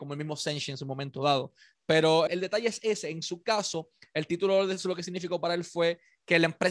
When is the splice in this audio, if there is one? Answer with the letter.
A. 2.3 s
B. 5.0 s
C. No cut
A